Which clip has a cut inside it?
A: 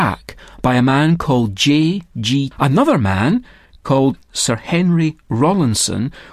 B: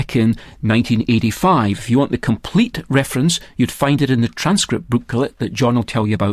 A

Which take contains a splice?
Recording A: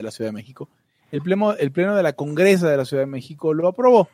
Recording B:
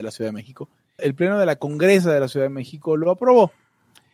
B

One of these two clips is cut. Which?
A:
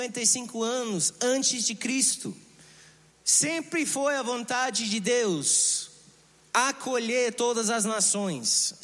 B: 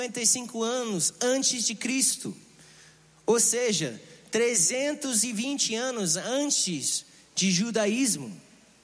A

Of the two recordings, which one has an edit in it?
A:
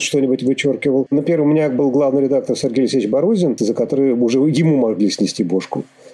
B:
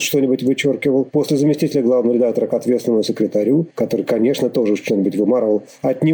A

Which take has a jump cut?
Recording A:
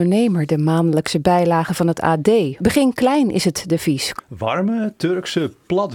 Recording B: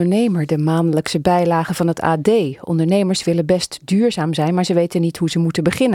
A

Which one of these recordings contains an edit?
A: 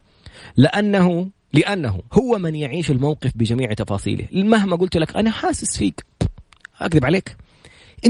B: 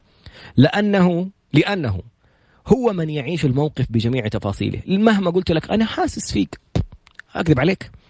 A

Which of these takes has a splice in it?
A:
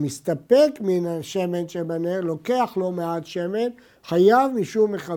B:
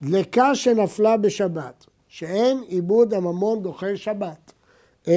B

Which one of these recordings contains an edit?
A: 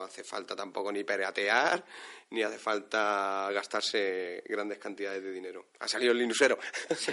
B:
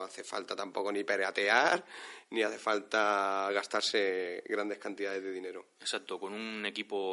A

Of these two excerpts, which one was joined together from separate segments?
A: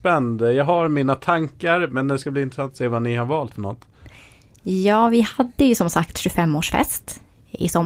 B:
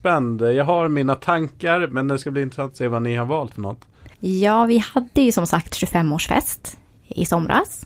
B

